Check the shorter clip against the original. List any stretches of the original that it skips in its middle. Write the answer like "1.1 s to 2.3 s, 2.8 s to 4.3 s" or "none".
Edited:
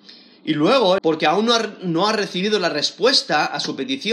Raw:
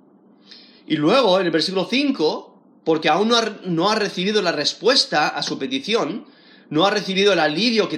1.4 s to 2.8 s